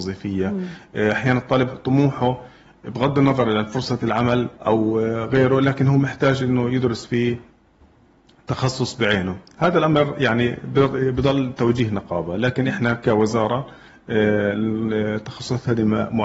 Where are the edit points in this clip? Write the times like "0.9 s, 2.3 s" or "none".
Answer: 4.6 s, 9.6 s

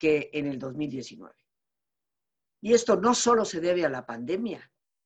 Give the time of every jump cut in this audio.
2.5 s

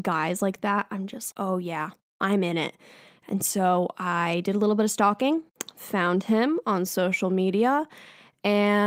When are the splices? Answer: 1.3 s

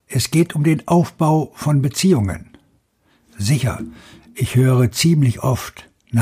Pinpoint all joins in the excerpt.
none

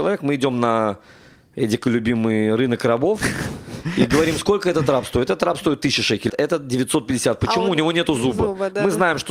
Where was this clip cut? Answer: 6.3 s

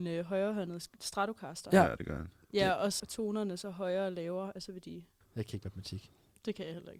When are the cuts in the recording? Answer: 3.0 s, 5.2 s

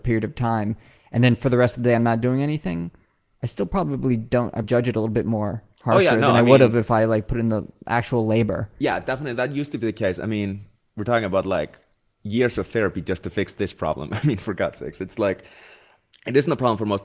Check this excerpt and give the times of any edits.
4.6 s

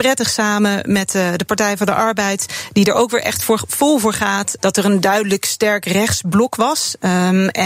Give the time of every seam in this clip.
4.6 s

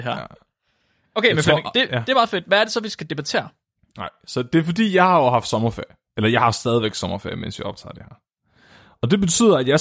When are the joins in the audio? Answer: none

